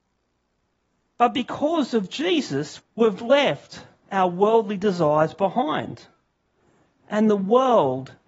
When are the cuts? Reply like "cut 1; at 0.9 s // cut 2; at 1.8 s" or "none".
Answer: cut 1; at 2.8 s